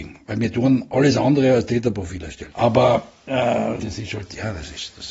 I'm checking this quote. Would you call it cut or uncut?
cut